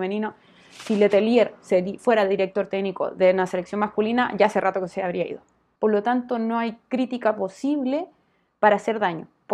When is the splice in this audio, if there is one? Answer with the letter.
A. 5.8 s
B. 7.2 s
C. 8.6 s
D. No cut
A